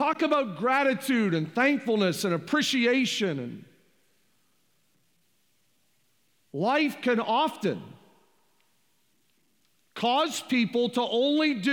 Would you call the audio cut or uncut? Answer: uncut